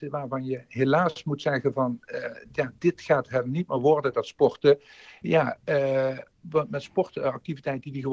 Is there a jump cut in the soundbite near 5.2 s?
yes; 1 cut; at 5.2 s

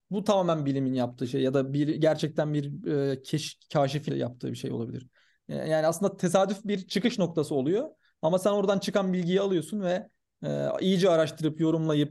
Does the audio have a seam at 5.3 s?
no; 1 cut; at 4.1 s

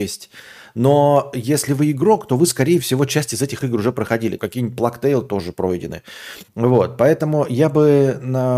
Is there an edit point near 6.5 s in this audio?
yes; 2 cuts; at 4.4 s, 6.5 s

